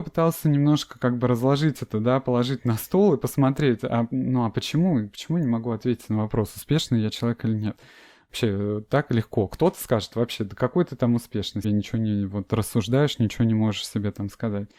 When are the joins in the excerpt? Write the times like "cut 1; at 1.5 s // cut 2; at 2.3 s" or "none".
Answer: cut 1; at 11.6 s